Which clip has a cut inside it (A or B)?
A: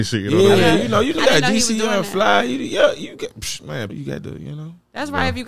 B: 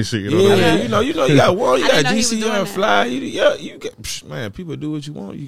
A